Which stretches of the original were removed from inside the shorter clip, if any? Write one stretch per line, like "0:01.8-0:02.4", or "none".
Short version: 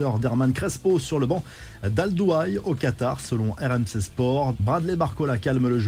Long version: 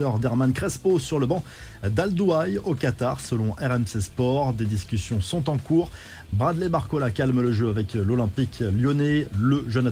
0:04.5-0:06.3